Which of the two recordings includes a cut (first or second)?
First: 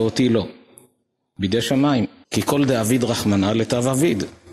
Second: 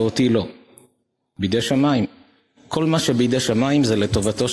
first